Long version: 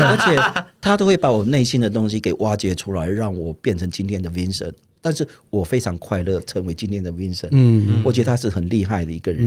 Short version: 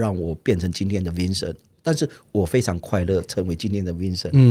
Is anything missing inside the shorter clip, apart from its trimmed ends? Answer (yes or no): no